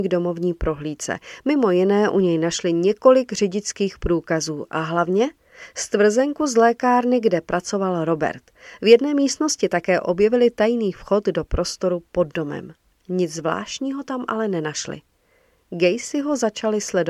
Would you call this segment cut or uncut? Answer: uncut